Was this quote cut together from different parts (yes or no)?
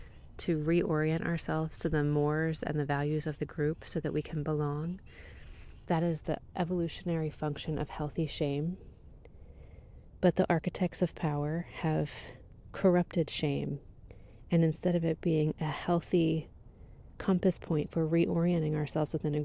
no